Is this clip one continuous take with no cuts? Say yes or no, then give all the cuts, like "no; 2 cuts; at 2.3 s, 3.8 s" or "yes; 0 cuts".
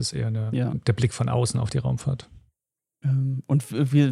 no; 1 cut; at 3.0 s